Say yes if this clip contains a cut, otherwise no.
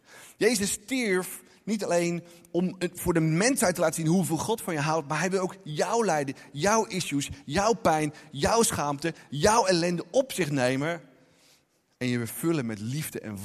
no